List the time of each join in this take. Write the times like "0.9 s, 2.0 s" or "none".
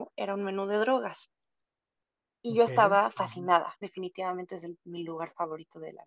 3.8 s